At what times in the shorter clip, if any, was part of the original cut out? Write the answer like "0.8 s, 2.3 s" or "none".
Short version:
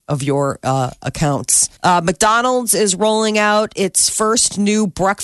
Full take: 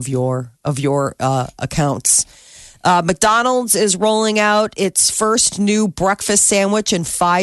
1.8 s